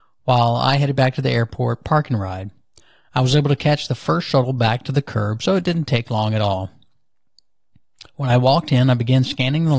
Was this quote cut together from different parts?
no; 0 cuts

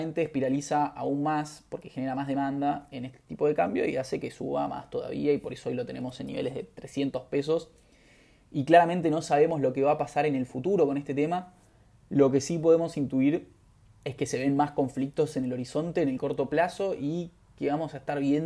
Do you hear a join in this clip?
no; 0 cuts

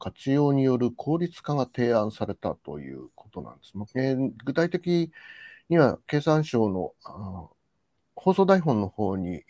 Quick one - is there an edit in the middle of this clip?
yes; 2 cuts; at 3.9 s, 8.0 s

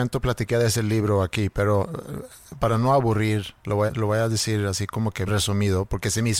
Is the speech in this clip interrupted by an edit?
yes; 2 cuts; at 3.9 s, 5.3 s

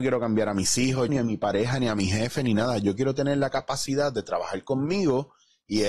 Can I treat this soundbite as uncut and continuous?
no; 1 cut; at 1.1 s

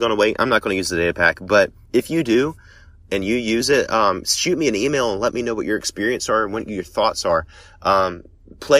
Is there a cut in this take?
no; 0 cuts

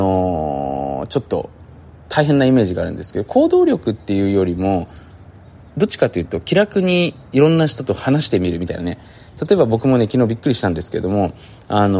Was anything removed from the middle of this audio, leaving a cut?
no; 0 cuts

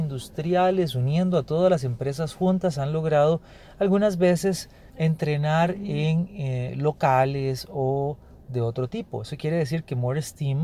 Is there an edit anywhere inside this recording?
yes; 2 cuts; at 4.9 s, 6.7 s

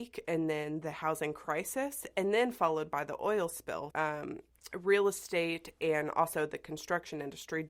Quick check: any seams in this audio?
yes; 1 cut; at 3.9 s

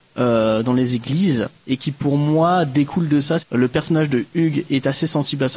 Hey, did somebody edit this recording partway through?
yes; 2 cuts; at 1.6 s, 3.4 s

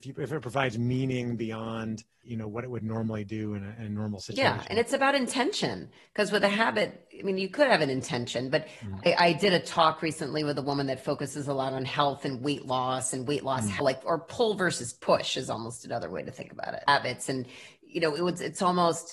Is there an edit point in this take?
yes; 2 cuts; at 13.8 s, 16.9 s

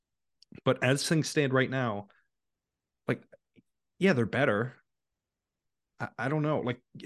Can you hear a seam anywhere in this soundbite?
yes; 1 cut; at 5.9 s

